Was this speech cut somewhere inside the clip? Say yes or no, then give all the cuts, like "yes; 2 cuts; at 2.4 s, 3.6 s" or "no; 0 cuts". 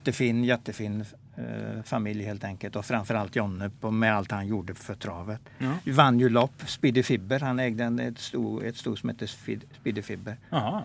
no; 0 cuts